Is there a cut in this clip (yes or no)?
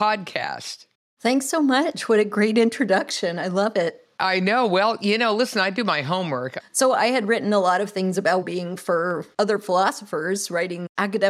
yes